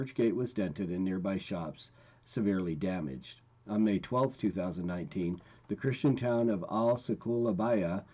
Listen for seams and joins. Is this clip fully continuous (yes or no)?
yes